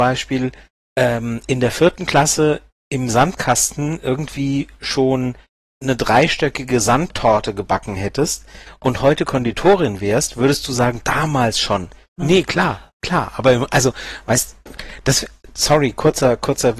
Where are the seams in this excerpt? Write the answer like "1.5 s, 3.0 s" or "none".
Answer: 5.7 s, 12.2 s